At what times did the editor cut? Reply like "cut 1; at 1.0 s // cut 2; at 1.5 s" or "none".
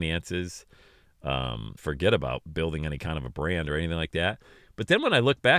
cut 1; at 1.8 s

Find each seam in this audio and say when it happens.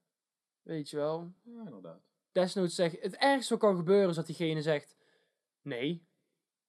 none

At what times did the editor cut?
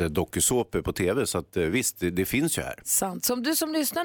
none

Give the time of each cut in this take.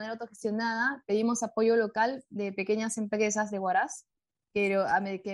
none

